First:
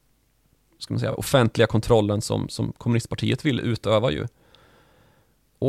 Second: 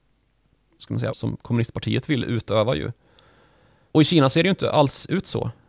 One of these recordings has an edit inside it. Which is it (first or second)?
second